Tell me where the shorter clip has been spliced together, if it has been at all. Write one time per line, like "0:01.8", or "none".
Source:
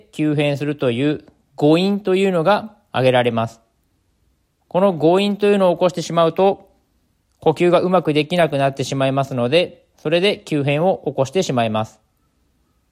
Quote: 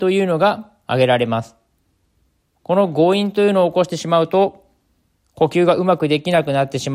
none